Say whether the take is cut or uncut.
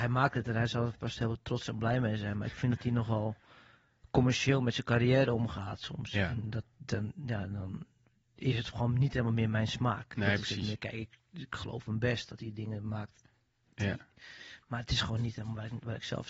uncut